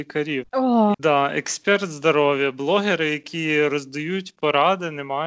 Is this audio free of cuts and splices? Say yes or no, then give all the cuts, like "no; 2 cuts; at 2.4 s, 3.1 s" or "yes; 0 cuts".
no; 1 cut; at 0.9 s